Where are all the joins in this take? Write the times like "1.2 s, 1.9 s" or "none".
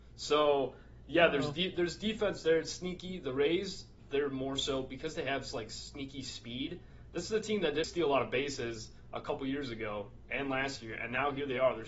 4.1 s, 7.8 s